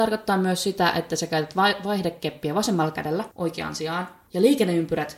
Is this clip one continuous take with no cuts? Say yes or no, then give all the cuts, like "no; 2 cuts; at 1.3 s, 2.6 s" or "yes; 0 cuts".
no; 1 cut; at 3.3 s